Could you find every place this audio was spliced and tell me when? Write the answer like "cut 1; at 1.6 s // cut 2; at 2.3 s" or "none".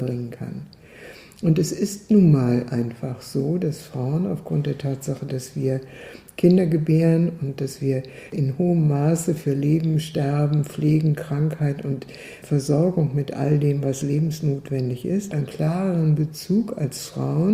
cut 1; at 15.3 s